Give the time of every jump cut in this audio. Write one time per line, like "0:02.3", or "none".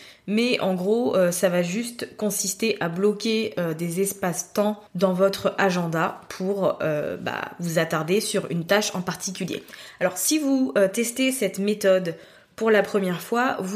0:04.9